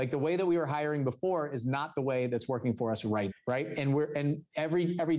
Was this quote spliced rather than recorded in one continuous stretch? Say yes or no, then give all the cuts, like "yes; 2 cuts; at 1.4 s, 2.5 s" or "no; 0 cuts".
yes; 1 cut; at 3.3 s